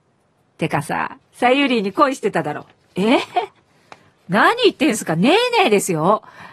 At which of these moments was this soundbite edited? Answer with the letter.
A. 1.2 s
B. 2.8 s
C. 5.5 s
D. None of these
A